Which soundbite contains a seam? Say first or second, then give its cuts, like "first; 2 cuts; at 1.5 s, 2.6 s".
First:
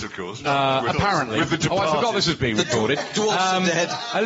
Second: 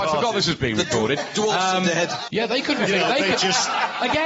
second; 1 cut; at 2.3 s